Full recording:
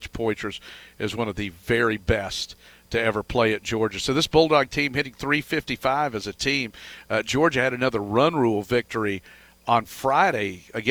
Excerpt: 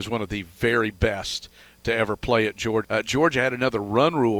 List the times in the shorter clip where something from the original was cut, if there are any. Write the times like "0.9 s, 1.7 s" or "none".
2.8 s